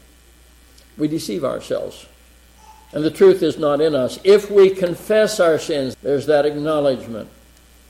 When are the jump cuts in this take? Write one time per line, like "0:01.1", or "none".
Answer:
0:05.9